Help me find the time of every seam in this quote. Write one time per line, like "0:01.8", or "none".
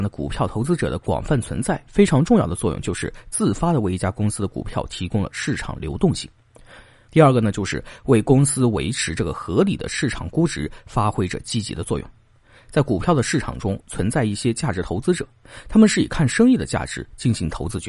none